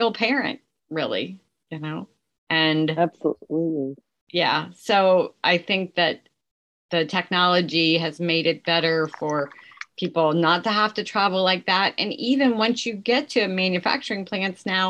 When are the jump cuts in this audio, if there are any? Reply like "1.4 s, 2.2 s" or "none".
none